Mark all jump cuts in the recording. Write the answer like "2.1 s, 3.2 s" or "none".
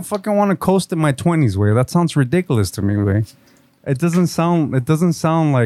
3.8 s

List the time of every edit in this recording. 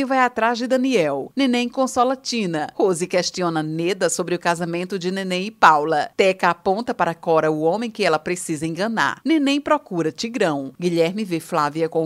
1.3 s

